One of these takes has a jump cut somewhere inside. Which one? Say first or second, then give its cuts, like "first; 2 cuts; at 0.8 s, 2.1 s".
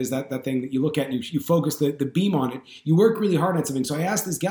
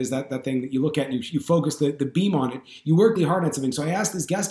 second; 1 cut; at 3.2 s